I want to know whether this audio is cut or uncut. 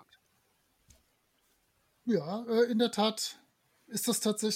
uncut